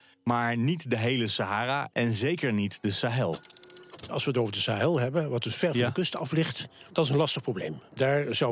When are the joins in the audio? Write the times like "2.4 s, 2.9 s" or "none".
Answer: 6.9 s